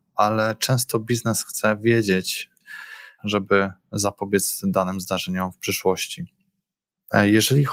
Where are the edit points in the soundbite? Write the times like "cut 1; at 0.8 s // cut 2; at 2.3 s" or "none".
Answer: cut 1; at 3.2 s